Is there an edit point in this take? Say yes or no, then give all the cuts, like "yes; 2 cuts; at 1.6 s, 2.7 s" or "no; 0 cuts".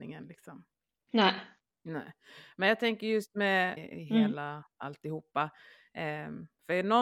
yes; 1 cut; at 3.8 s